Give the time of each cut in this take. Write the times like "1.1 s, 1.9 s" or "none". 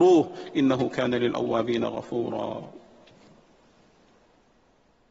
none